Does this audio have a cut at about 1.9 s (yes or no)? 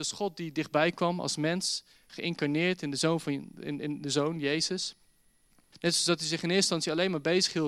no